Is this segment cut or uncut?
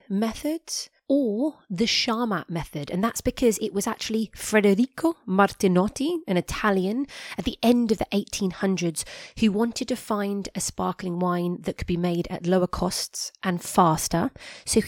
uncut